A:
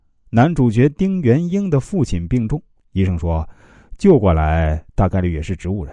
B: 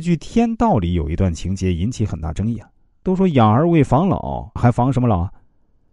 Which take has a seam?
B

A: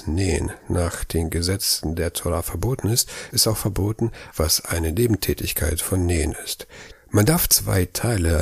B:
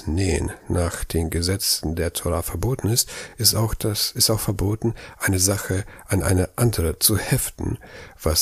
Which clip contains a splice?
A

